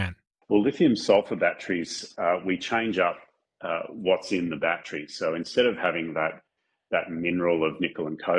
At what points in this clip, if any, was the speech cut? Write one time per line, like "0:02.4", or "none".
none